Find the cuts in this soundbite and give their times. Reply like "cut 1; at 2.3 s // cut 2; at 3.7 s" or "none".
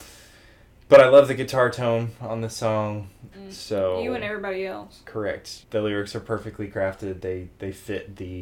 cut 1; at 3.3 s // cut 2; at 5.6 s